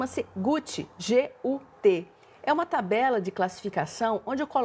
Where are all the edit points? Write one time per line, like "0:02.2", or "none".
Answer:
none

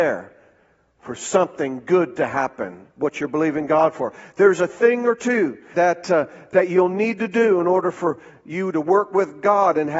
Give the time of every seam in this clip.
0:05.7

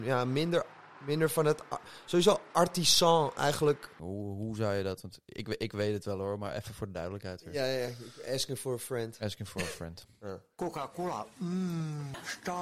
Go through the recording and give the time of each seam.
0:04.0

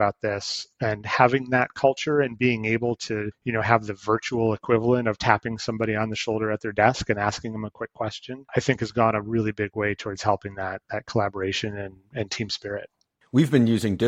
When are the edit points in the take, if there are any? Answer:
none

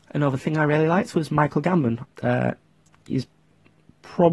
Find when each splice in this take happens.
0:02.0

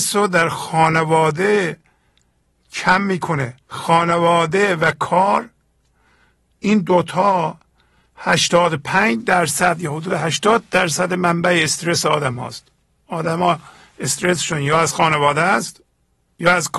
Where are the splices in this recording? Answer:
0:03.6

